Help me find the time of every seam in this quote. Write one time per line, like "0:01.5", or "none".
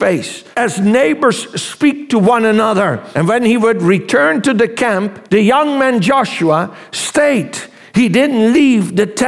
0:05.3